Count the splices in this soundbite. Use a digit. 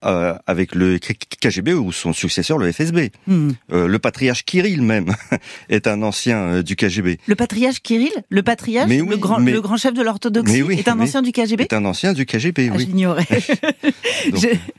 0